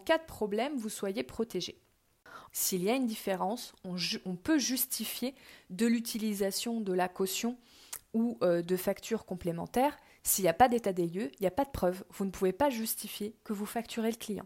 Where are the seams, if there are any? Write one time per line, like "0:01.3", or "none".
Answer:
0:02.5